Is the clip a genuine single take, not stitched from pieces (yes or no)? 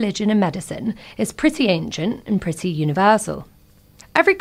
yes